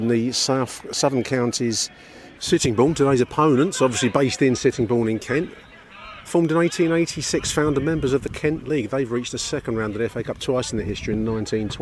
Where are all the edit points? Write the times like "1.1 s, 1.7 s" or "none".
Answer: 2.4 s, 6.3 s